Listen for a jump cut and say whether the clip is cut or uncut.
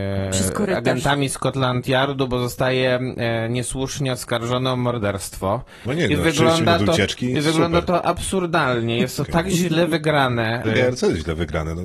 cut